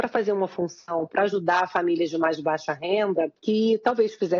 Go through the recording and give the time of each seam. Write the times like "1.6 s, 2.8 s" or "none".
3.4 s